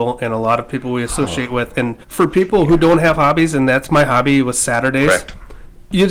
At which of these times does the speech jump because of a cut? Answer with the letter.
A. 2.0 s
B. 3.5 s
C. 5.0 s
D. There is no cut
A